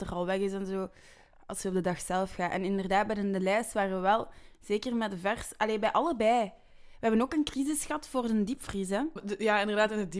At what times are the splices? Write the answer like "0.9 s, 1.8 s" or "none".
none